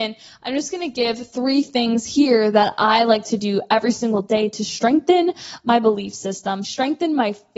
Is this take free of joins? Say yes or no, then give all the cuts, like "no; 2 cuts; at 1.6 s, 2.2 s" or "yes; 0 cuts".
no; 1 cut; at 6.6 s